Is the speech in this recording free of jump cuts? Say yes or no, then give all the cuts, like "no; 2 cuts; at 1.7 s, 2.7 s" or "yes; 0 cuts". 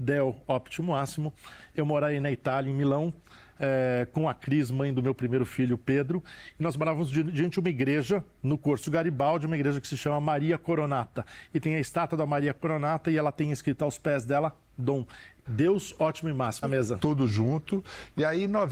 no; 2 cuts; at 15.4 s, 16.6 s